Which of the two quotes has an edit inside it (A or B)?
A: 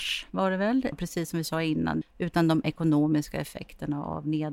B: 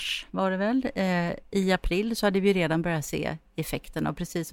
A